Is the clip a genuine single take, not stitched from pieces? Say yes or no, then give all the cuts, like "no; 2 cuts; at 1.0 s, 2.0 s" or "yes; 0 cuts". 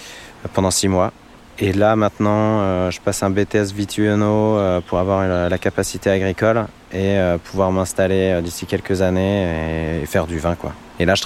yes; 0 cuts